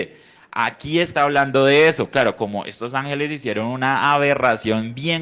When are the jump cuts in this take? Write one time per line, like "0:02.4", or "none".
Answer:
none